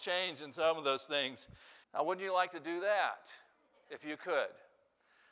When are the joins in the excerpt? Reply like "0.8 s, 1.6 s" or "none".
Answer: 1.8 s